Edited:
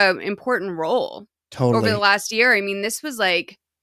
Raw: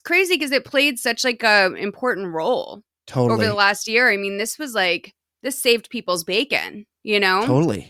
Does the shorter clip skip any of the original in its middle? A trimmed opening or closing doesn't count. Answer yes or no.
no